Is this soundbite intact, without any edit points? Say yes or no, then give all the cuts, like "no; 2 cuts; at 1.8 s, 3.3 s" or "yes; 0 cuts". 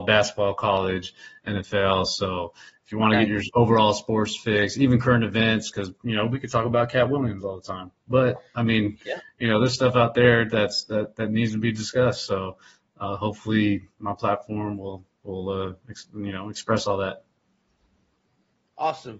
yes; 0 cuts